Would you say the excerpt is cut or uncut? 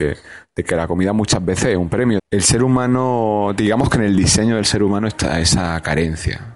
cut